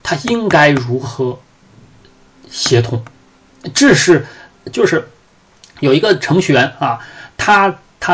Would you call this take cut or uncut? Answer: cut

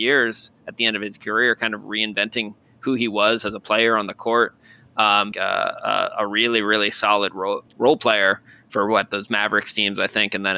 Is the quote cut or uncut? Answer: cut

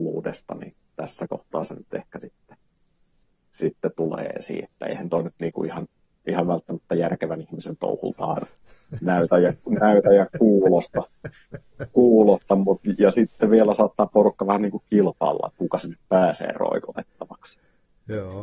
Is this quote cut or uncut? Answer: uncut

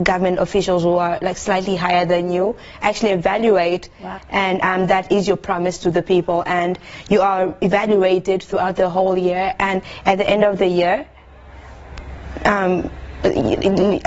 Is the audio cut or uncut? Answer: cut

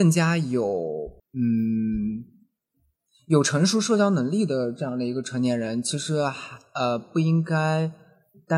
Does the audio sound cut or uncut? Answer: cut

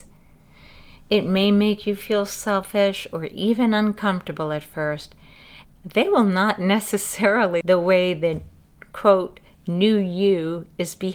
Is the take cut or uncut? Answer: cut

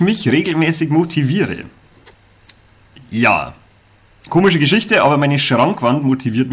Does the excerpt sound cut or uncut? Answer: uncut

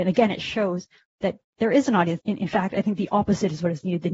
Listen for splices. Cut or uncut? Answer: cut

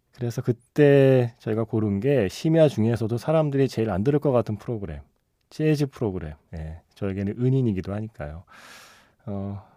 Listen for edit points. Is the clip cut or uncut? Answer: cut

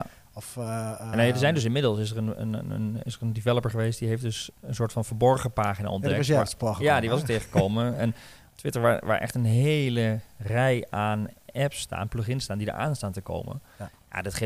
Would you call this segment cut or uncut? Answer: uncut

